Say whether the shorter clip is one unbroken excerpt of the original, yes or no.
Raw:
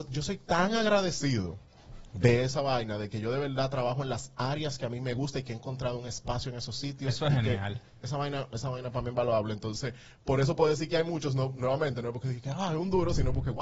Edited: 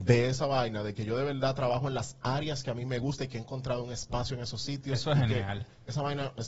yes